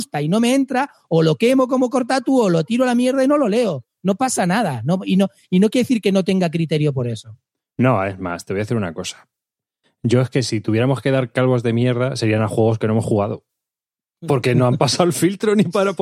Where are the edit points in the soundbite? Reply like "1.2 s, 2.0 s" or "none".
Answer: none